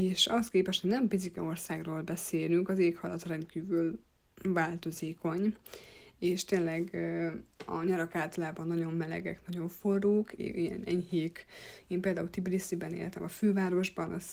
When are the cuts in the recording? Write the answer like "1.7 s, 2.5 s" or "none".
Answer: 10.4 s